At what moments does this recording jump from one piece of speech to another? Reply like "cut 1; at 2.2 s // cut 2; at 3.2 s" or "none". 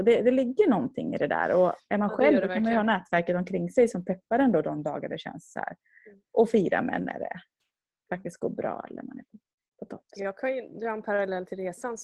none

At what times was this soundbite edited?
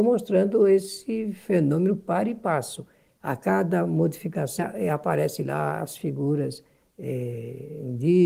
cut 1; at 4.6 s

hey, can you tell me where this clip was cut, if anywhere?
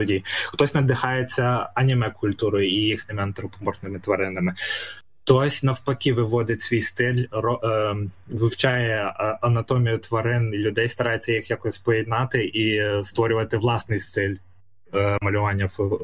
none

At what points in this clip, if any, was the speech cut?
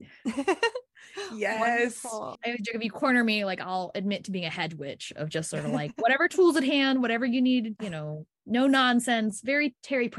cut 1; at 2.3 s // cut 2; at 7.8 s

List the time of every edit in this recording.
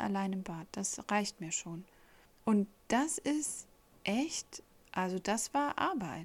cut 1; at 2.3 s

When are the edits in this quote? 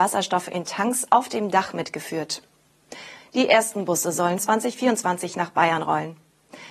cut 1; at 3.2 s // cut 2; at 4.4 s

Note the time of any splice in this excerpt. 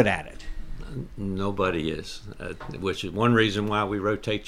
none

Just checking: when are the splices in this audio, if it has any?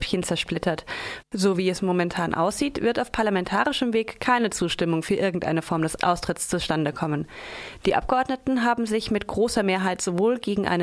cut 1; at 1.2 s

